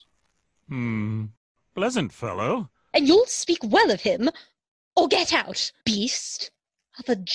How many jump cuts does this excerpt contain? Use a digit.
2